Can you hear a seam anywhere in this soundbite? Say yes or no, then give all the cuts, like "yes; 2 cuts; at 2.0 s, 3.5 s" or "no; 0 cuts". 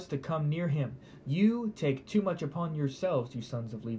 yes; 1 cut; at 1.2 s